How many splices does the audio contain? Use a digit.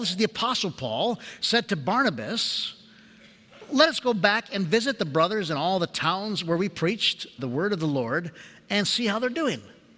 1